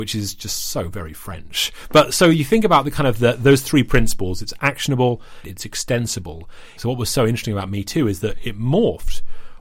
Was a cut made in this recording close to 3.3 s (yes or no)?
no